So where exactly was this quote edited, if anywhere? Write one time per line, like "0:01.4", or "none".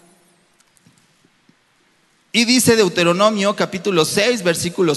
none

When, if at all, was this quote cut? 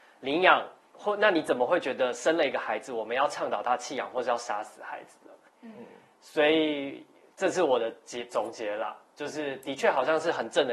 0:05.5

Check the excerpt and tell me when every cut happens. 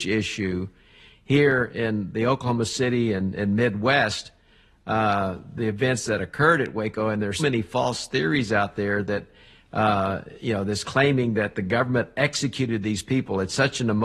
0:07.4

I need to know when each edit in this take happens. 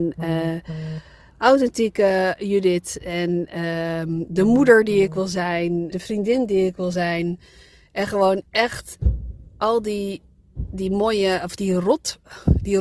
0:05.9

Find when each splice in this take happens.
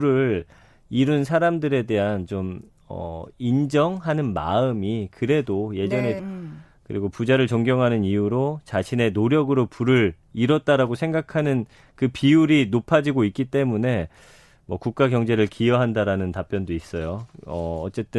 0:06.2

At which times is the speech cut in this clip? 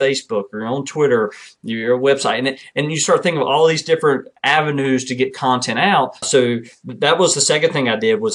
0:06.2

